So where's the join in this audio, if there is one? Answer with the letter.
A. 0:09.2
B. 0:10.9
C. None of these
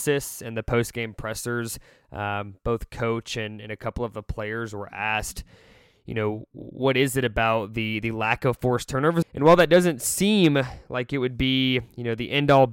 A